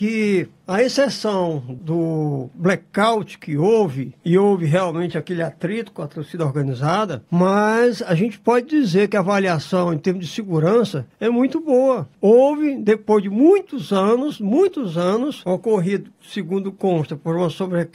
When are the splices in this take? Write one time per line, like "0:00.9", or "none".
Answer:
0:12.1
0:15.5